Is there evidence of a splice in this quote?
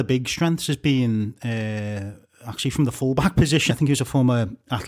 yes; 1 cut; at 3.7 s

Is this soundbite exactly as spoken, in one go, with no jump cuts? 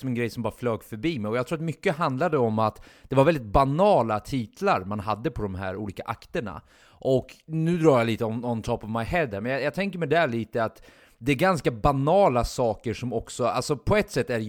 yes; 0 cuts

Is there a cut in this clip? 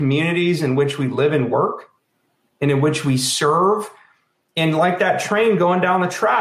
no; 0 cuts

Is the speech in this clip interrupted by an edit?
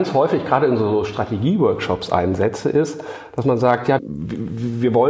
yes; 1 cut; at 4.0 s

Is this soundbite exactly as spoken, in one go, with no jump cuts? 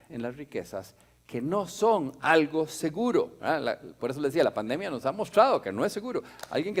yes; 0 cuts

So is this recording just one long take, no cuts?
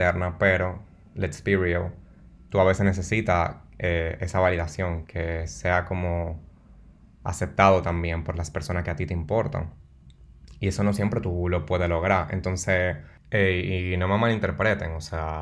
no; 1 cut; at 5.0 s

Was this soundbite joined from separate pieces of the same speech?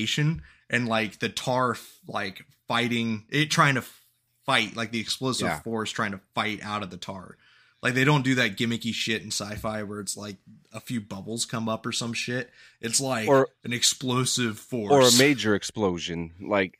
no; 0 cuts

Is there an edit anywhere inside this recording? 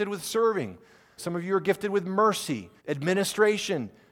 yes; 2 cuts; at 1.2 s, 2.8 s

